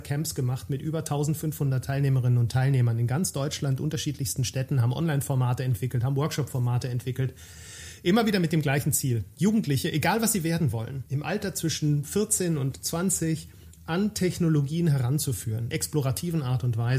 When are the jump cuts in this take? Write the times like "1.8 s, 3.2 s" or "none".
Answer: 11.1 s, 15.7 s